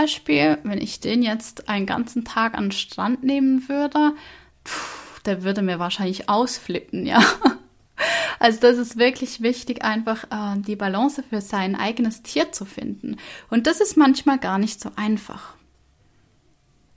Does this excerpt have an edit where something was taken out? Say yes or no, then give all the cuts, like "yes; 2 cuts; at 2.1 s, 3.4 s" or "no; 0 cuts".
no; 0 cuts